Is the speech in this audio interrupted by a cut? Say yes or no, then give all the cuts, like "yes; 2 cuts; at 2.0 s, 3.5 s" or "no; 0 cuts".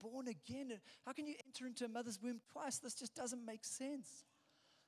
no; 0 cuts